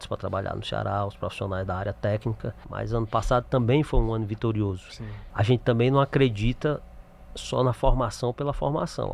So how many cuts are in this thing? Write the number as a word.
two